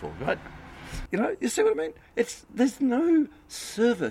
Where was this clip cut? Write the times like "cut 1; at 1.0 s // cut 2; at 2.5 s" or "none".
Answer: cut 1; at 1.1 s